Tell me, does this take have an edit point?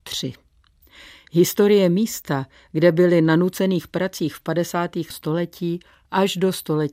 yes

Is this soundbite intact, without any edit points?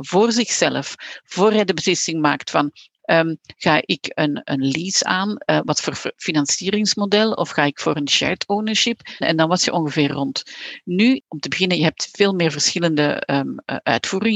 no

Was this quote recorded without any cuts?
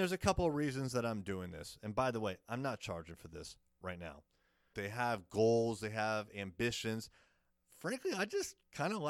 no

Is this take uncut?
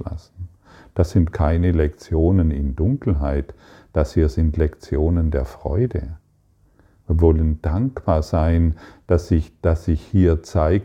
yes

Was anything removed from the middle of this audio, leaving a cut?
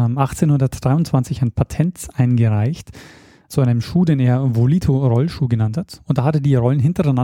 no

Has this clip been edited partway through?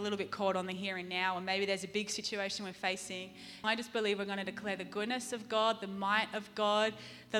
yes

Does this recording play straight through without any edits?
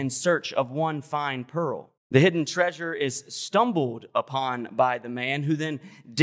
no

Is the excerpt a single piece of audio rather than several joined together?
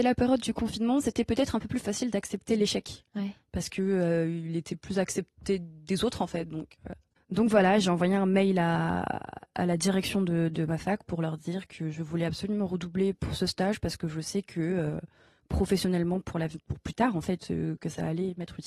yes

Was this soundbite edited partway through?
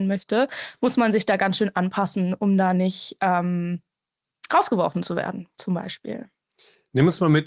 no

